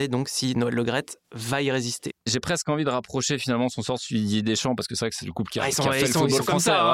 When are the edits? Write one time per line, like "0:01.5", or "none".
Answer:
none

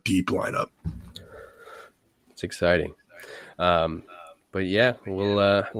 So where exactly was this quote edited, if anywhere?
0:02.3

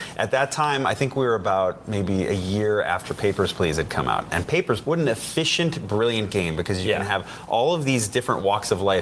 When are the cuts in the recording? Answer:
0:04.8

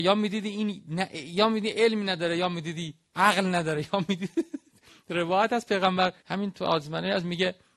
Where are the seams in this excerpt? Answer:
0:06.2

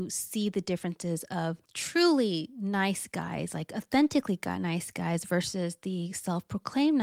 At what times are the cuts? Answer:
0:01.6

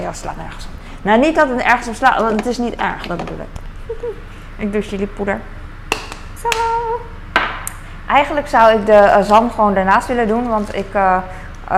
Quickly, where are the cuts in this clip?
0:06.4

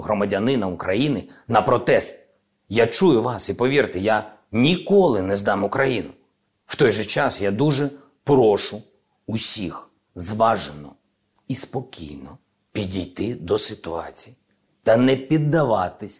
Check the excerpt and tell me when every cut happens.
none

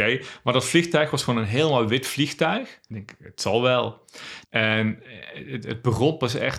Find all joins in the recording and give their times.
0:02.9
0:04.4

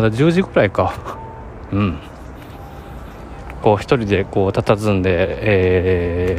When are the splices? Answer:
0:01.7

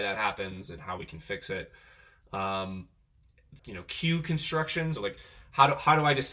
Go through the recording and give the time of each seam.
0:03.6
0:05.0

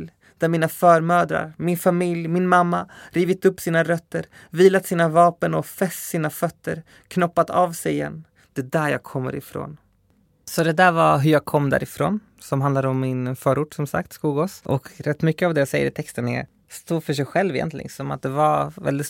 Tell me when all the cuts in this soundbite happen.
none

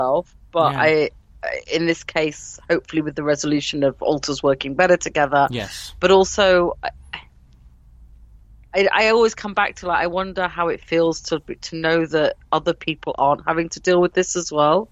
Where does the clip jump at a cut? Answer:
none

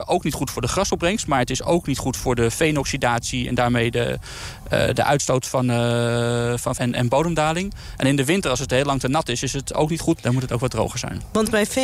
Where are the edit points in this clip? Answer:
0:06.8
0:10.2

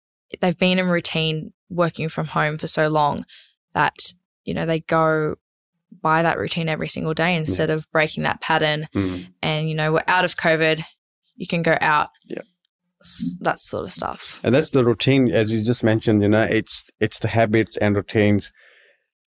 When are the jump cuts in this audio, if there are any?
none

